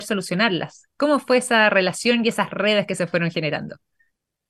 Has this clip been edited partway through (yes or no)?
no